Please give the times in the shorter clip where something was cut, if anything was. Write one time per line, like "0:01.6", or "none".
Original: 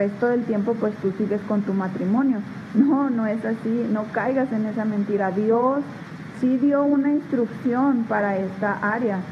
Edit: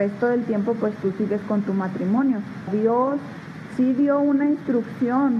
0:02.7